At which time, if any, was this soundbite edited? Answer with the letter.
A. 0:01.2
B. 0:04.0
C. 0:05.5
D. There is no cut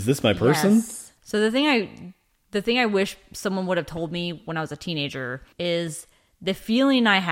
C